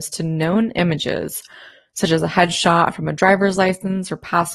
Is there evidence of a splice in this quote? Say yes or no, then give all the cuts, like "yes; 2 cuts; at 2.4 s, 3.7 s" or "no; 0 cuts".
no; 0 cuts